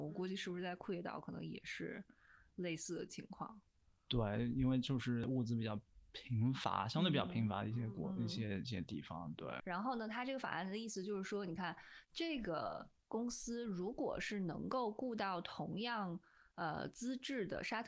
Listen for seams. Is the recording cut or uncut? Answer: cut